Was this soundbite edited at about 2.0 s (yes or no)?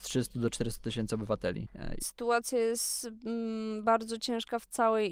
yes